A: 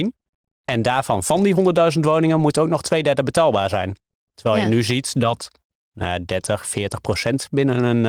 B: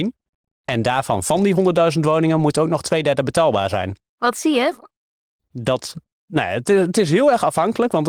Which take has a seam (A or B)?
B